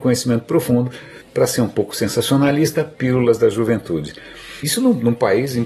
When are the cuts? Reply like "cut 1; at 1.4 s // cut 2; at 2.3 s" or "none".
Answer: cut 1; at 1.2 s // cut 2; at 4.6 s